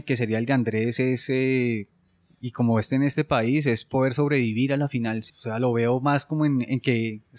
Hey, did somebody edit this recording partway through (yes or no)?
yes